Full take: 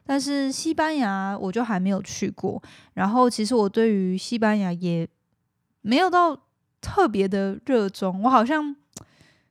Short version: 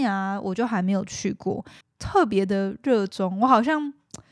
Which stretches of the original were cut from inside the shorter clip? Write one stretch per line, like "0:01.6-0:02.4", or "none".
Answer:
0:02.8-0:06.6